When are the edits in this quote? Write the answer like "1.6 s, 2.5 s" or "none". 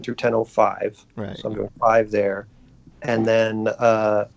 none